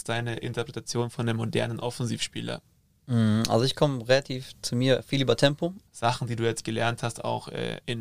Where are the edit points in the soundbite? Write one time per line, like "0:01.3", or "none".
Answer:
0:05.9